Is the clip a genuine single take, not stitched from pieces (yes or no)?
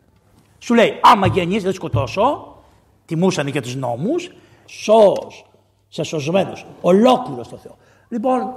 no